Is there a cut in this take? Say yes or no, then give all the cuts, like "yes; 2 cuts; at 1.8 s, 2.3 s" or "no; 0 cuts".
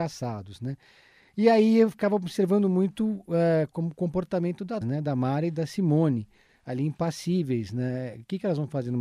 yes; 1 cut; at 4.8 s